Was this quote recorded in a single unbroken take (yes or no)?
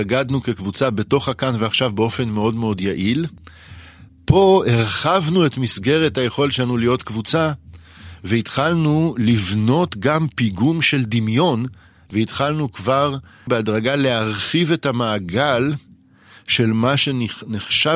yes